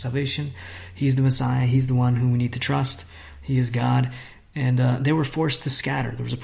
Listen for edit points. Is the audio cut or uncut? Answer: uncut